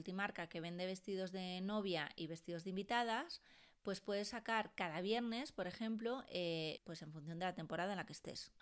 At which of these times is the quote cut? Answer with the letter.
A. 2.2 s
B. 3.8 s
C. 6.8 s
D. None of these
C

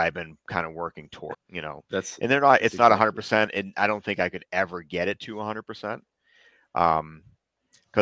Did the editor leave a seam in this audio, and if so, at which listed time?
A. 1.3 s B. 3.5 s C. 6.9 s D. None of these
A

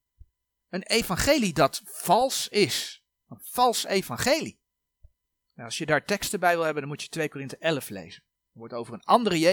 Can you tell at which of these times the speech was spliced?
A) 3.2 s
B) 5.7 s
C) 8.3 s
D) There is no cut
D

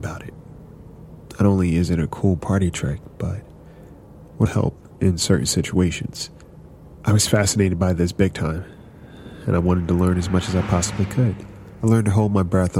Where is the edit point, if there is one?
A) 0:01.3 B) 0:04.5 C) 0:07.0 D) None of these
B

